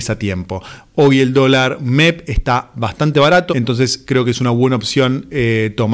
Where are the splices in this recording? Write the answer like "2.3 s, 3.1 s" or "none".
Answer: 3.5 s